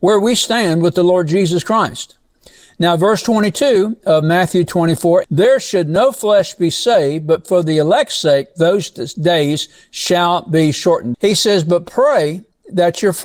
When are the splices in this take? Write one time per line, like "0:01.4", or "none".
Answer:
0:05.2
0:11.1